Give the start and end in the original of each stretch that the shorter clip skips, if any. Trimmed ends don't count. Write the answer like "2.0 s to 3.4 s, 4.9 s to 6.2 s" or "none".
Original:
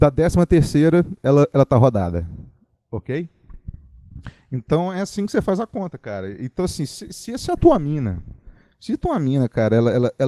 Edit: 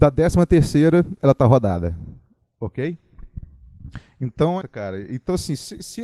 1.2 s to 1.5 s, 4.9 s to 5.9 s